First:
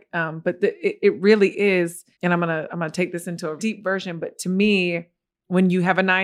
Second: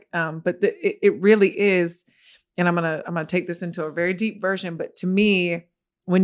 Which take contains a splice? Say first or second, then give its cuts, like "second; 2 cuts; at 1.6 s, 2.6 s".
first; 2 cuts; at 2.1 s, 3.6 s